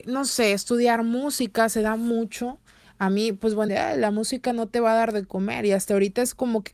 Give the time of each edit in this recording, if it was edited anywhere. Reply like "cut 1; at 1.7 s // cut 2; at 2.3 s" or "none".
cut 1; at 3.7 s